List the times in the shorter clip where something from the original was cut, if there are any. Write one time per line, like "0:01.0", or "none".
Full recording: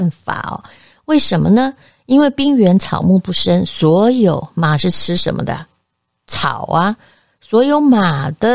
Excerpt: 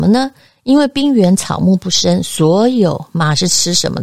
none

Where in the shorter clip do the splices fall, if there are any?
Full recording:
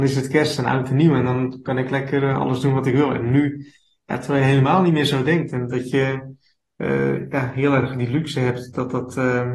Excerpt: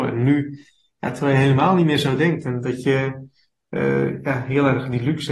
none

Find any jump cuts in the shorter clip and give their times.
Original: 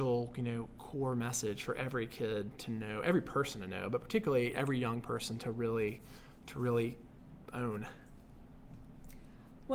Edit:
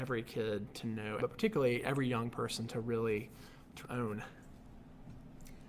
0:01.2
0:03.8

